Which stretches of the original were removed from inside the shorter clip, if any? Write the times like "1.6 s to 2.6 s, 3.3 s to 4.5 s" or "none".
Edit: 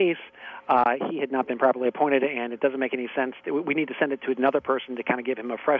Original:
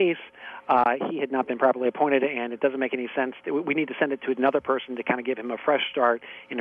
none